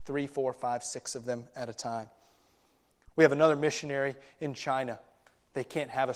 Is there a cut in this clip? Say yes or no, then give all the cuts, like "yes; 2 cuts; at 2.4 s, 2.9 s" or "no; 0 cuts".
no; 0 cuts